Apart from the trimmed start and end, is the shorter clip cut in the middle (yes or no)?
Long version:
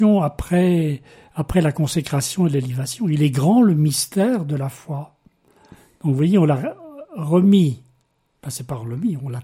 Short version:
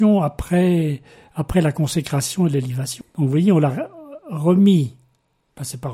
yes